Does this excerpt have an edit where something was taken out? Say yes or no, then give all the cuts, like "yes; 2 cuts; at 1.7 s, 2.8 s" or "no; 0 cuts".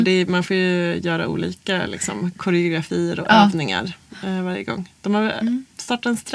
no; 0 cuts